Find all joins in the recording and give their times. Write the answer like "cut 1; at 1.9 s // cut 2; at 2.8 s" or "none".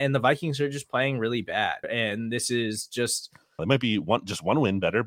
cut 1; at 1.8 s // cut 2; at 3.6 s